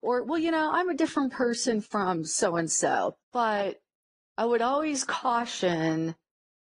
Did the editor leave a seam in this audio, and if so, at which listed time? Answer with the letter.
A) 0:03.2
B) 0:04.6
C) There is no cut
A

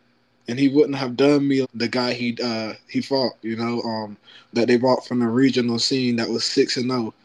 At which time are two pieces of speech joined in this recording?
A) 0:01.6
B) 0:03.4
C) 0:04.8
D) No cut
A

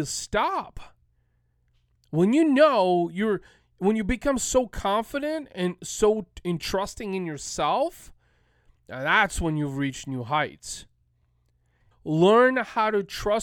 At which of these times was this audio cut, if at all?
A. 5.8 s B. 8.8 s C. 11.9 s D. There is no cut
C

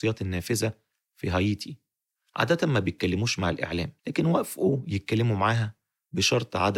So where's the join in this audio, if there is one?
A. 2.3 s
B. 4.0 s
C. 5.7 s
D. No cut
B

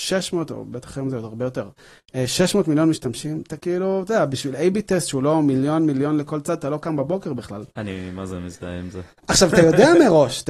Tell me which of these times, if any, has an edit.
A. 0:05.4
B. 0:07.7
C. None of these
C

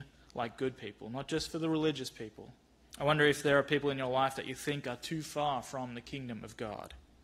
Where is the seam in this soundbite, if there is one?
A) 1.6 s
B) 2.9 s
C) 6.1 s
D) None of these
B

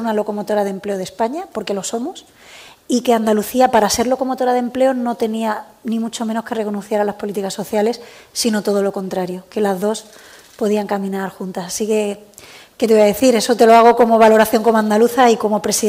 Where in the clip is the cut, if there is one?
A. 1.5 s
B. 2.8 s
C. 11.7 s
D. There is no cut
D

